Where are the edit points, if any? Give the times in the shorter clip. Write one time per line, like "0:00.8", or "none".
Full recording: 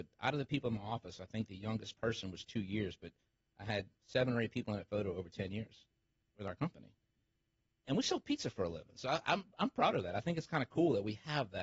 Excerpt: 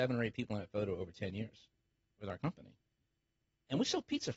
none